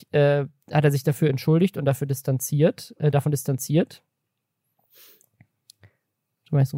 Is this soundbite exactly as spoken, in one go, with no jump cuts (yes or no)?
yes